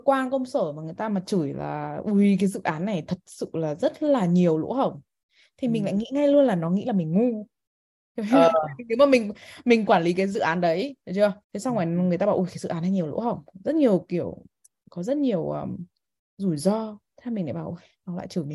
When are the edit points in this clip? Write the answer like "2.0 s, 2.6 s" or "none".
11.4 s, 17.1 s